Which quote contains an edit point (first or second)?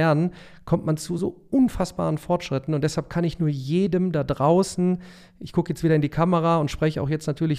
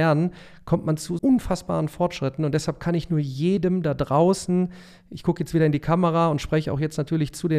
second